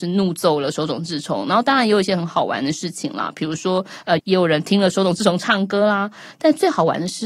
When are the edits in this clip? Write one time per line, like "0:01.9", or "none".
0:04.2